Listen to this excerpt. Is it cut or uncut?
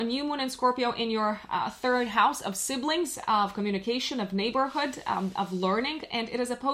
uncut